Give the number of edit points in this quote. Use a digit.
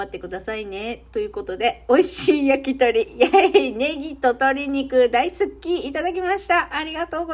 0